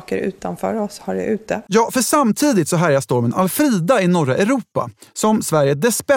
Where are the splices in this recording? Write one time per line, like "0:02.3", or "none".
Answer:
0:01.7